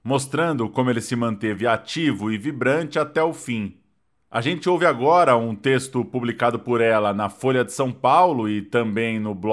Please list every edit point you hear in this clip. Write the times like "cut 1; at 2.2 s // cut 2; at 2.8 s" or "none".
none